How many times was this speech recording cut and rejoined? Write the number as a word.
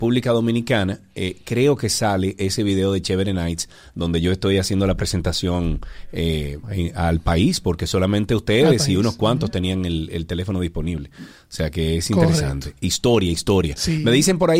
one